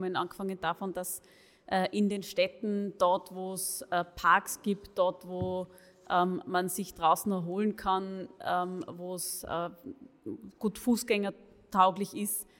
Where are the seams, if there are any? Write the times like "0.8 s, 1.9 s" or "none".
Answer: none